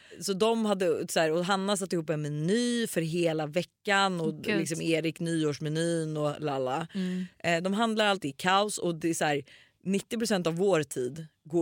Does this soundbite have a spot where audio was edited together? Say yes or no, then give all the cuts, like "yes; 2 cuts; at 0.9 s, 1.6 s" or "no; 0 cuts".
yes; 1 cut; at 8.2 s